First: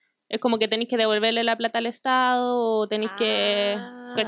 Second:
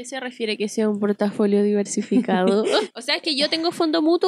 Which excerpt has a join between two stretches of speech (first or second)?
second